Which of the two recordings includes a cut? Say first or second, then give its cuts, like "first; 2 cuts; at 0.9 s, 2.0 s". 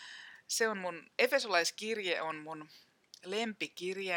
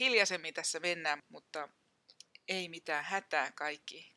second; 1 cut; at 1.2 s